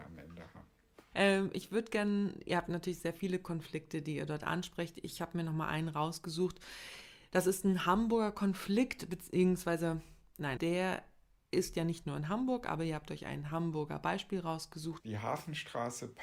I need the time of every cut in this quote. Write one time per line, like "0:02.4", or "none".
0:10.6
0:15.0